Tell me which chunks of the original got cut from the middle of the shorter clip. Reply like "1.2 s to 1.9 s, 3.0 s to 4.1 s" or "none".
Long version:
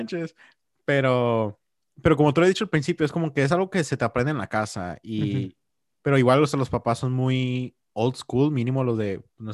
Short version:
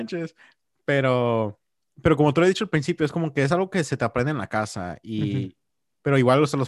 none